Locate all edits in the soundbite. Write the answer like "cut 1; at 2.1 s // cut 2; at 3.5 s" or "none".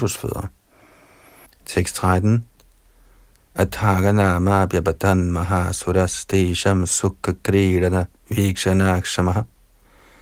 cut 1; at 1.5 s